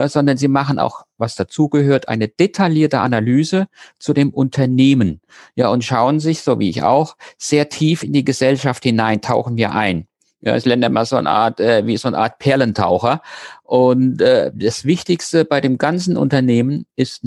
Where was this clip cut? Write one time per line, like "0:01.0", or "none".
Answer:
none